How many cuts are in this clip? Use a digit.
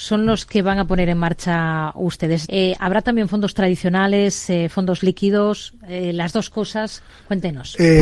1